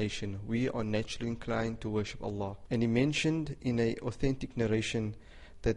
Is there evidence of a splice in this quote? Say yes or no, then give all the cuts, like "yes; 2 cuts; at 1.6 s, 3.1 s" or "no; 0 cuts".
yes; 1 cut; at 2.7 s